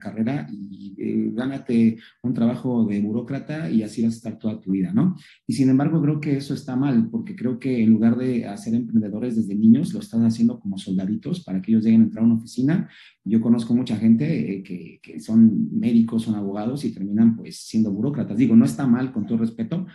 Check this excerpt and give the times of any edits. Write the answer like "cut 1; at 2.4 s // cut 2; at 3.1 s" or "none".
cut 1; at 5.3 s